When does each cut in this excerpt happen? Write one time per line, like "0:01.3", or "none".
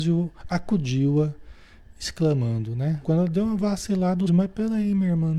0:03.0
0:04.3